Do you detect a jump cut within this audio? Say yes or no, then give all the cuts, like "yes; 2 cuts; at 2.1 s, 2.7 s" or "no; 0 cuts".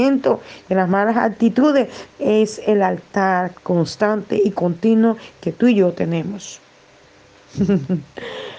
yes; 2 cuts; at 2.1 s, 7.0 s